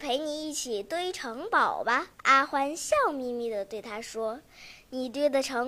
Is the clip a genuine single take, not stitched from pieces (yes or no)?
no